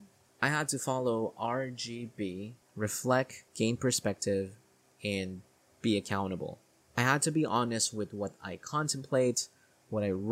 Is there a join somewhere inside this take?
yes; 1 cut; at 3.5 s

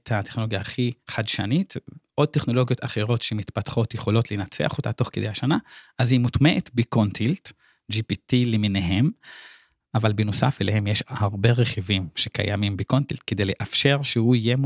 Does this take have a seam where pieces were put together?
no; 0 cuts

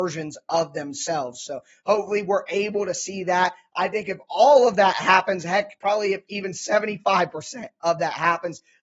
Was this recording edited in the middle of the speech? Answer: no; 0 cuts

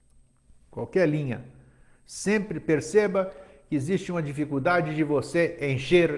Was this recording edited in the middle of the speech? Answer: no; 0 cuts

